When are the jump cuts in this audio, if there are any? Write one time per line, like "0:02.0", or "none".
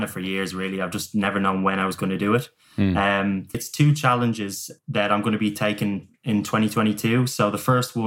0:03.5